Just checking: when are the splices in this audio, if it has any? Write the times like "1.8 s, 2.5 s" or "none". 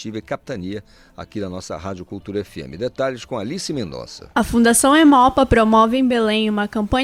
none

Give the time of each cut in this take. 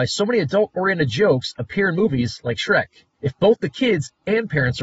3.1 s

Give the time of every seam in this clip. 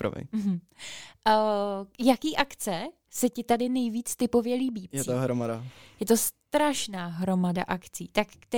4.9 s

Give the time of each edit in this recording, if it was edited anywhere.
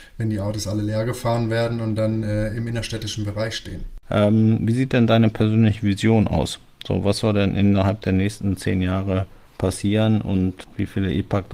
4.0 s

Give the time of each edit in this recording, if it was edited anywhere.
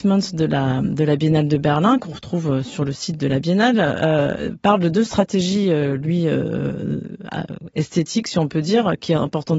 none

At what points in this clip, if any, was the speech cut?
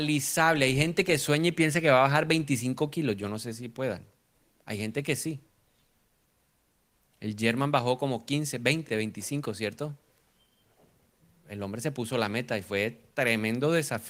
none

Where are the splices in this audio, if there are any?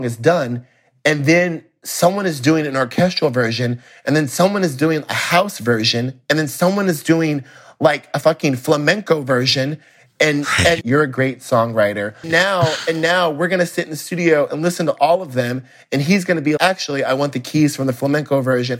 10.8 s, 12.2 s, 16.6 s

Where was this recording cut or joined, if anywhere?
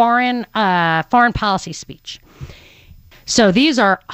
3.1 s

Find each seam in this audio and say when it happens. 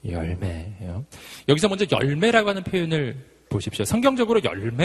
none

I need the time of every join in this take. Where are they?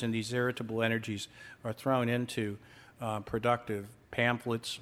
none

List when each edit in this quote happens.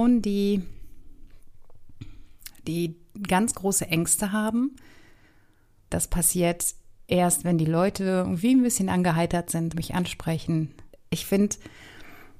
5.9 s, 9.7 s, 10.9 s

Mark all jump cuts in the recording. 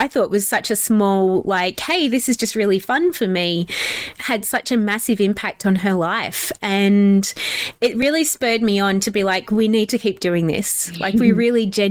none

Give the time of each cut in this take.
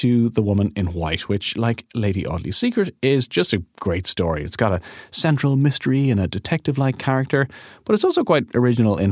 4.4 s

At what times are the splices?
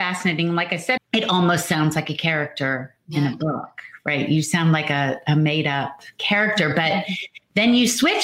1.0 s

